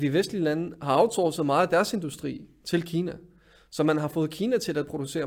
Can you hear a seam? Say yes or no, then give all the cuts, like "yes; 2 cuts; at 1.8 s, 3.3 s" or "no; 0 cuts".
no; 0 cuts